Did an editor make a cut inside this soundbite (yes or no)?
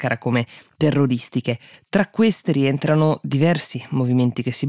no